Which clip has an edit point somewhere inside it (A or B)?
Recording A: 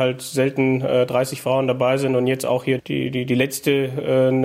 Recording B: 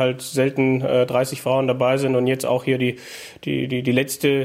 A